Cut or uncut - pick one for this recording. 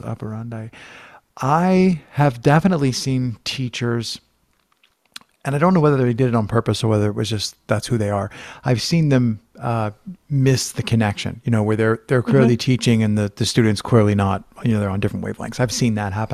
uncut